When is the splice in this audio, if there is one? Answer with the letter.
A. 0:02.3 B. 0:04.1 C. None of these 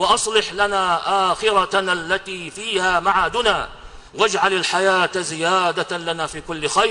B